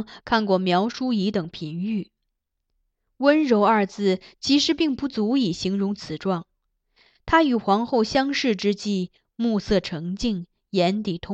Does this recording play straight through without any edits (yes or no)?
yes